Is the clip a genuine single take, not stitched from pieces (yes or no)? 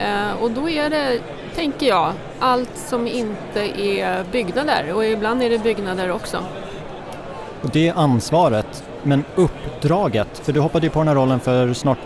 yes